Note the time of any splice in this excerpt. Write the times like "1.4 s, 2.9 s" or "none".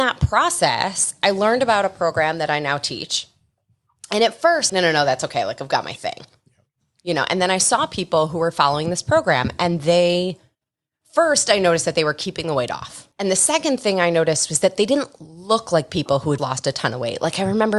4.7 s, 13.1 s, 16.4 s